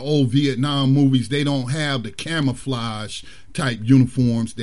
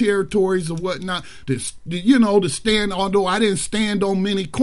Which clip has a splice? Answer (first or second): second